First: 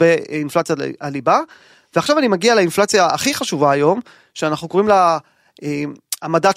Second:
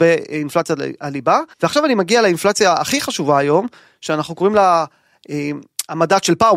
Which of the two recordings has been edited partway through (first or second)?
second